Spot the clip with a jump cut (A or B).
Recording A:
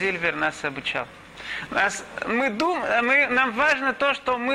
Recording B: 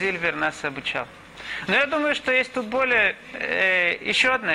A